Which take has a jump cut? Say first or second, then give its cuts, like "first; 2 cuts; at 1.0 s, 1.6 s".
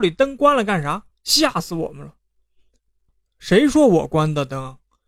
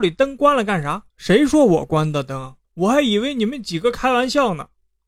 second; 2 cuts; at 1.1 s, 2.6 s